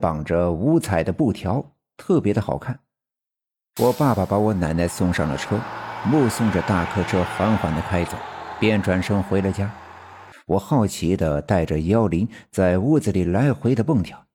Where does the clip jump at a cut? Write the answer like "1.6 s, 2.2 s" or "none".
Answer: 3.8 s, 10.3 s